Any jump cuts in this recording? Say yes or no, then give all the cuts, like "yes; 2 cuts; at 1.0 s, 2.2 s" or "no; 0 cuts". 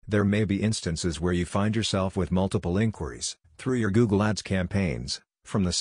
no; 0 cuts